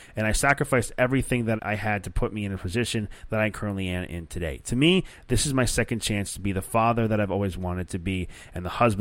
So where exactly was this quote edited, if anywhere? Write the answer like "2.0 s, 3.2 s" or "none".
1.6 s